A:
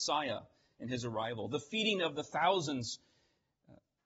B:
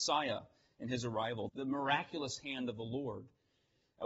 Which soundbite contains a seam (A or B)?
B